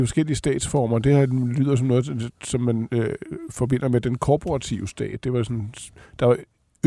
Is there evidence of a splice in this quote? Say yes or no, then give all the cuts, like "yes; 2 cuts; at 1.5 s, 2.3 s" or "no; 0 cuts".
no; 0 cuts